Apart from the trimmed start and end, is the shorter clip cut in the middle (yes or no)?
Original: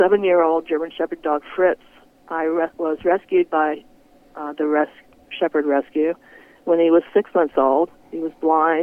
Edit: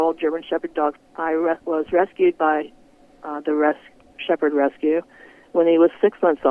yes